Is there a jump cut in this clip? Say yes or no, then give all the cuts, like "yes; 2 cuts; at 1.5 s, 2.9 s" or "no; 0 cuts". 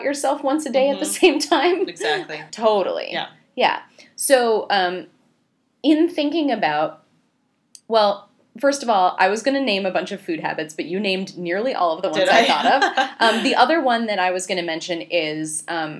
yes; 1 cut; at 2.5 s